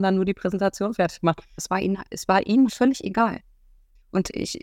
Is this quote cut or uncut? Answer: cut